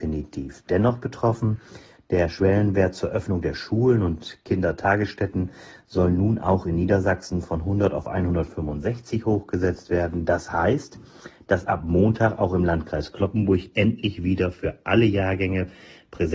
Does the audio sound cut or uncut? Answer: uncut